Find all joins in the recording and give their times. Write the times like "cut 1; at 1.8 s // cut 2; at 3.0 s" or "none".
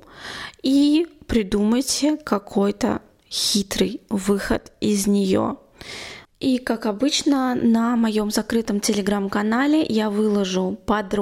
cut 1; at 6.2 s